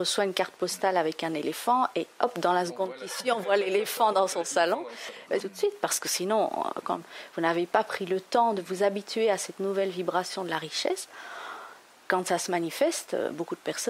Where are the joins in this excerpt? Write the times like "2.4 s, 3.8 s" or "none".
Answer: 5.4 s, 6.8 s